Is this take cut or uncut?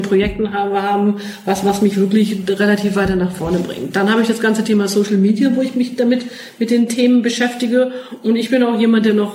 uncut